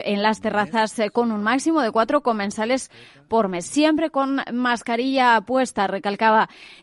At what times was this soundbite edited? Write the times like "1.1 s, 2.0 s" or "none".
3.6 s